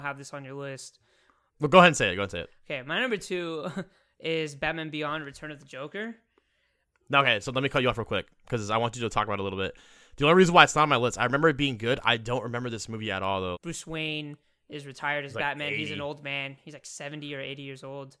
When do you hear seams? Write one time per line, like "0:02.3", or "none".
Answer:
0:01.5
0:13.5